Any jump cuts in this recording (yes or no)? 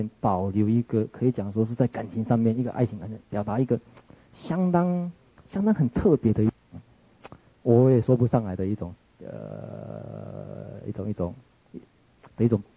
no